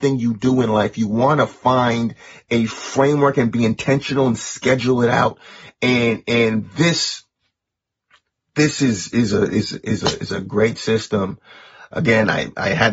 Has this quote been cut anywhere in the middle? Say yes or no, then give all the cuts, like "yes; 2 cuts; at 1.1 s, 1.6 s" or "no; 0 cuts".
no; 0 cuts